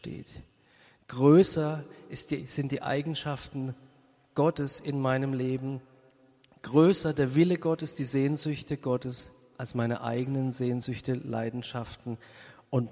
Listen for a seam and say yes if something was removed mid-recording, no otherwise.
no